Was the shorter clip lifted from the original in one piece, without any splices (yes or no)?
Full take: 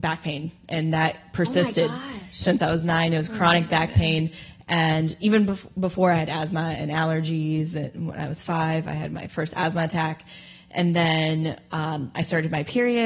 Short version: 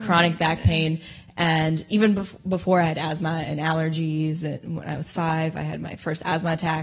yes